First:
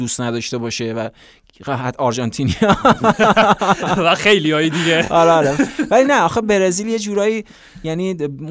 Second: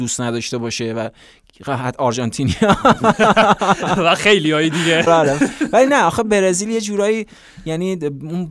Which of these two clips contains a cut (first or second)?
second